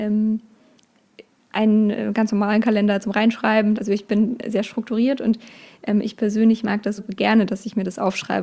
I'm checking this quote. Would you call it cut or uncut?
cut